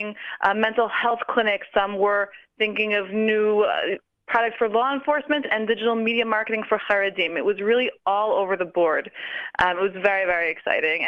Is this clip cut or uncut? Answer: uncut